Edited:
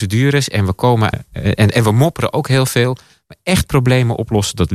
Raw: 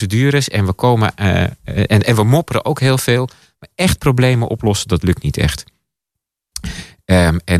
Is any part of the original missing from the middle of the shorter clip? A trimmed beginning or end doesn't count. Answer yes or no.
yes